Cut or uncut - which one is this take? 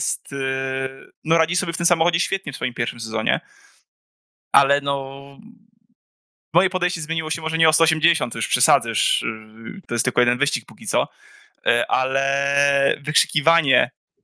cut